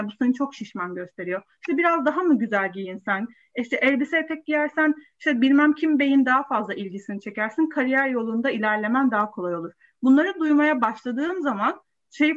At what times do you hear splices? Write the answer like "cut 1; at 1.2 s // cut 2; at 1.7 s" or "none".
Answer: none